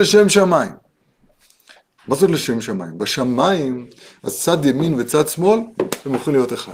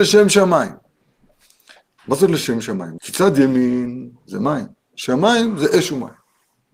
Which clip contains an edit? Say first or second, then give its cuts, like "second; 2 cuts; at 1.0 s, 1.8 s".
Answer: second; 2 cuts; at 3.0 s, 4.9 s